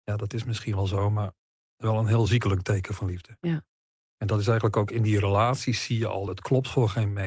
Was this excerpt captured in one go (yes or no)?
yes